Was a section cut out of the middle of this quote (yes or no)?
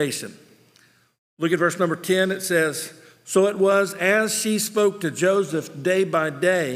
no